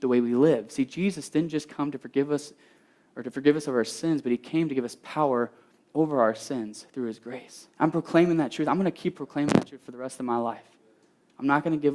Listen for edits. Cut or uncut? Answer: cut